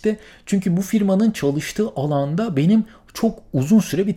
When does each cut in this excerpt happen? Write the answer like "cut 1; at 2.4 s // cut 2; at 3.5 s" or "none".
none

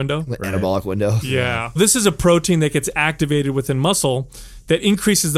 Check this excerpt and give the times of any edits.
cut 1; at 1.8 s

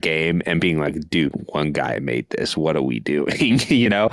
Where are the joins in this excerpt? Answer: none

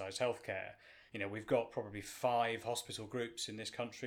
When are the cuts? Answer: none

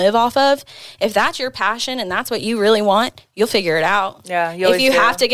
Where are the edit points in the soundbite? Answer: none

